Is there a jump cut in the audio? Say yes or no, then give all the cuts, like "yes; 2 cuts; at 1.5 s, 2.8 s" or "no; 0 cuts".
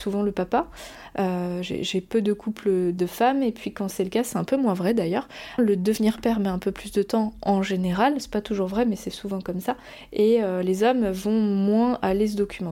yes; 2 cuts; at 3.0 s, 5.6 s